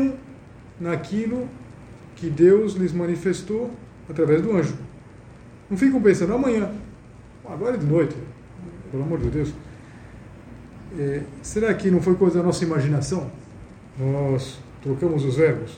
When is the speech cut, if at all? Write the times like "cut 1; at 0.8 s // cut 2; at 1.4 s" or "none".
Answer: cut 1; at 8.9 s // cut 2; at 13.9 s